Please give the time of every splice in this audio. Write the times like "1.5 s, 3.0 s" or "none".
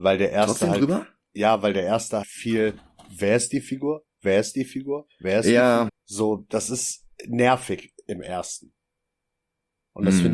2.2 s, 5.9 s, 7.1 s